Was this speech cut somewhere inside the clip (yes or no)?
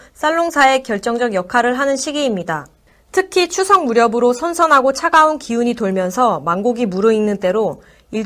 no